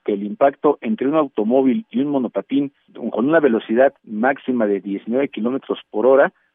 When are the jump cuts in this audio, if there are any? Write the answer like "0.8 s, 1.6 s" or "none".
4.0 s